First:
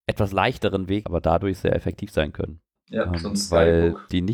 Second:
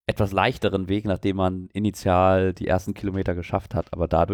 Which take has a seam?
first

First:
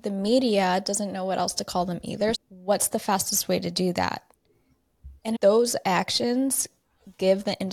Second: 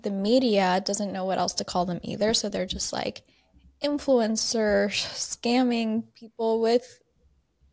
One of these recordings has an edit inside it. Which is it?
first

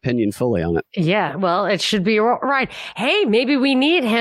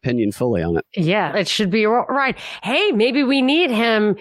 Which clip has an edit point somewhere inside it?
second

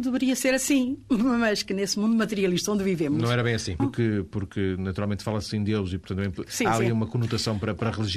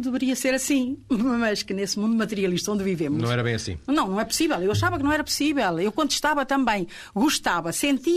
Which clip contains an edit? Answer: first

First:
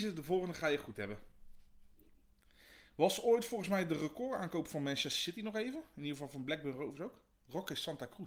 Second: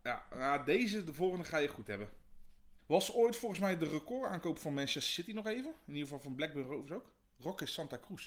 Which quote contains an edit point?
second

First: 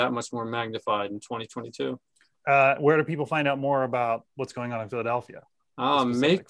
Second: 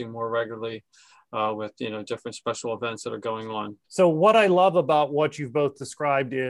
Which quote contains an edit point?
second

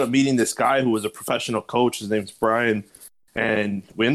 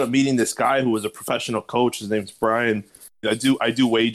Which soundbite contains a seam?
second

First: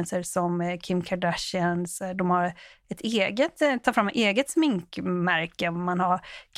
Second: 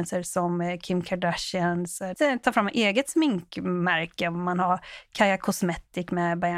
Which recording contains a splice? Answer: second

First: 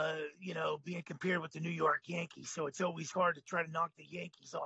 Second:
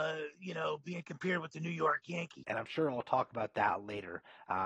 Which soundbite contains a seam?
second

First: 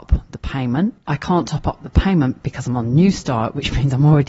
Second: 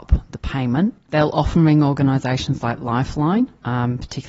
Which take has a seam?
second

